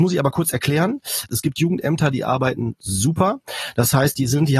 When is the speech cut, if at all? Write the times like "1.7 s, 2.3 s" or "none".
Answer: 1.3 s